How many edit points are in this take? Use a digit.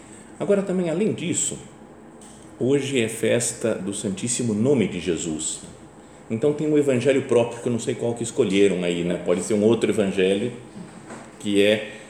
0